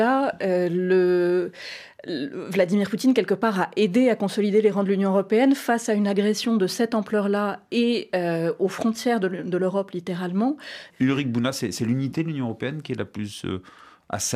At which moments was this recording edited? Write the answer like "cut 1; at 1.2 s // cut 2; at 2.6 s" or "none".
cut 1; at 10.9 s